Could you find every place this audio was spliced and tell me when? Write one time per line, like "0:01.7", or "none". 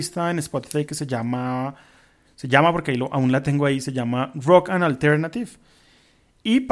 none